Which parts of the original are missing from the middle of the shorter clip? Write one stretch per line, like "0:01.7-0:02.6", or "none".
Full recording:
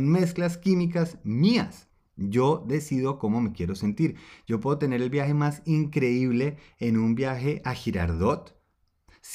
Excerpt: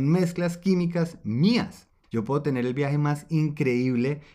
0:02.0-0:04.4